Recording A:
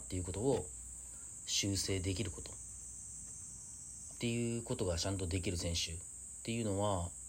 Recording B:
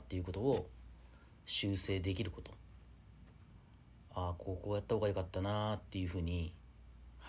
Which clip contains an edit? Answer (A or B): A